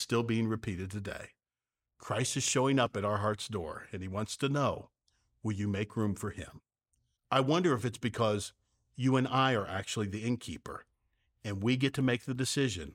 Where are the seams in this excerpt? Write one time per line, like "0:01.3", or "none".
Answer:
0:07.2